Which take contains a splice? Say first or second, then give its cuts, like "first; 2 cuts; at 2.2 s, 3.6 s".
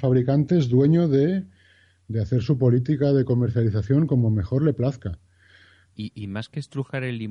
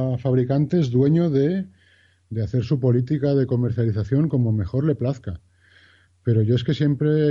first; 1 cut; at 5.9 s